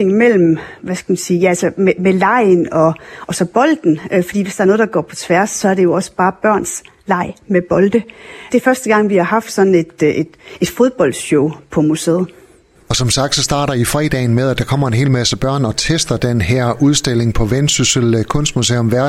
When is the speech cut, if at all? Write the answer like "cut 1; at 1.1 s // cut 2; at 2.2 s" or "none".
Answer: cut 1; at 8.5 s